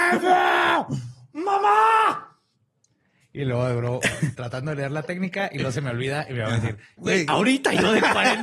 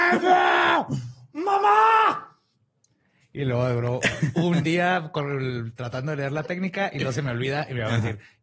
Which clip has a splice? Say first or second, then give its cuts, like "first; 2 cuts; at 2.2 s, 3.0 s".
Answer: first; 2 cuts; at 4.3 s, 7.0 s